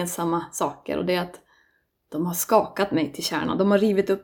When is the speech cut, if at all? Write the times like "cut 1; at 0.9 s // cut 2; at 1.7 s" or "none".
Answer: none